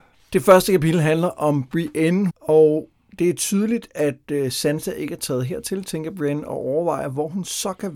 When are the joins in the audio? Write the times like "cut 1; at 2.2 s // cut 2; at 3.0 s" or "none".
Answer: cut 1; at 2.3 s